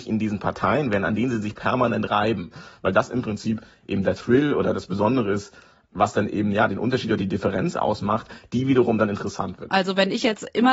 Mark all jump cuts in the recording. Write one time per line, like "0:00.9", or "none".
0:09.7